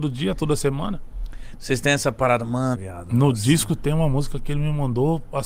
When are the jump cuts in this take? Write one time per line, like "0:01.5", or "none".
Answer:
0:01.5
0:02.7